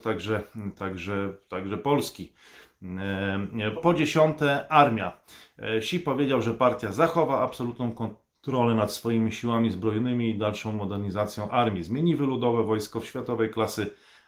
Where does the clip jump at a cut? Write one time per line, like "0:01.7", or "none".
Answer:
0:03.8